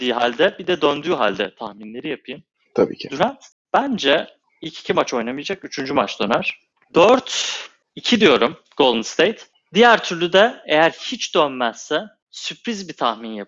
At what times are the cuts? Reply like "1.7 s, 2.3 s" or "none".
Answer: none